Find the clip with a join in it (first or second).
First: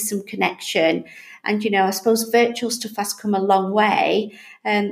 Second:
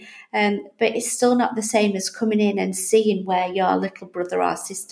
first